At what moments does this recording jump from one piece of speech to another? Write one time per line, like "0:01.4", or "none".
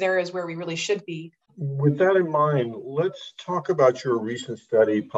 0:01.5